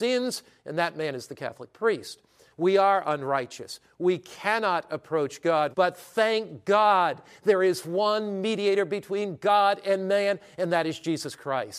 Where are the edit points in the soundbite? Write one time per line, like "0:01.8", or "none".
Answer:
0:02.5
0:05.7